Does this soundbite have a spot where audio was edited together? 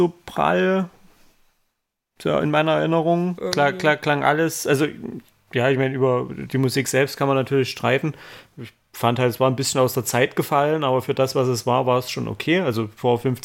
yes; 1 cut; at 3.4 s

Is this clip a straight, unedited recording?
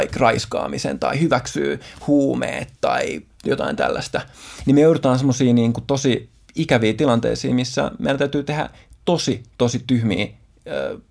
yes; 0 cuts

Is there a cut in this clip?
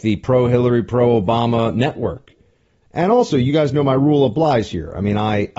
yes; 1 cut; at 2.8 s

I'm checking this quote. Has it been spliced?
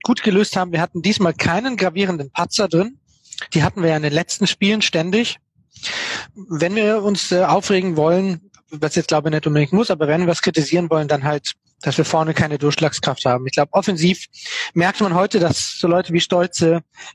no; 0 cuts

